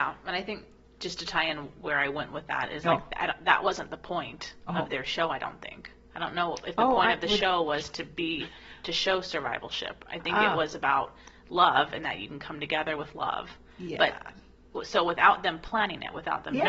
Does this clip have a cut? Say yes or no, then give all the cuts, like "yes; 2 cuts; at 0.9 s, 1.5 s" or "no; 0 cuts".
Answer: no; 0 cuts